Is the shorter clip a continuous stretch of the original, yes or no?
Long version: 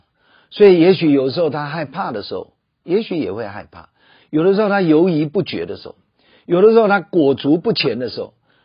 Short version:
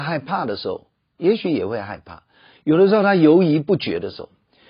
yes